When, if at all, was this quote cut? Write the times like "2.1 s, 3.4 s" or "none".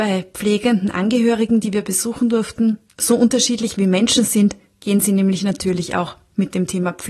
2.9 s